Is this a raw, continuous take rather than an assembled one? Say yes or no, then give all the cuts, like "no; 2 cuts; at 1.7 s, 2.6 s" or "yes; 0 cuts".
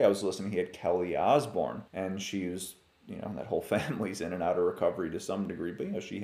no; 1 cut; at 1.9 s